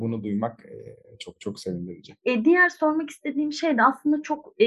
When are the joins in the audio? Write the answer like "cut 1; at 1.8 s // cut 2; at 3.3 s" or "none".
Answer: none